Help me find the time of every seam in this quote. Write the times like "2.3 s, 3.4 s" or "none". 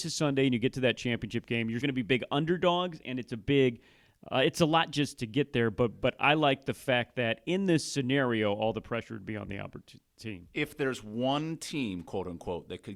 1.8 s

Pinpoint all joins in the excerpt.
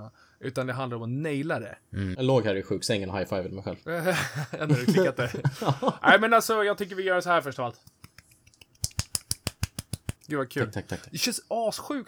2.1 s, 10.1 s

